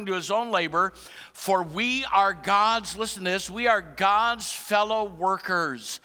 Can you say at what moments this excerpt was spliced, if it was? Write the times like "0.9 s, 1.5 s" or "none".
none